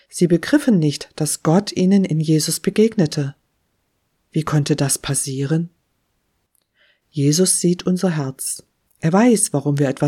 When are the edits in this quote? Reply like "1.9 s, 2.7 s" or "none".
none